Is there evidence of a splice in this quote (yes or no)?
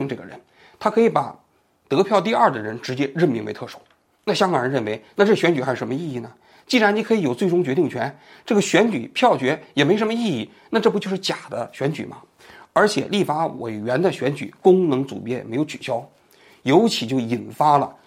no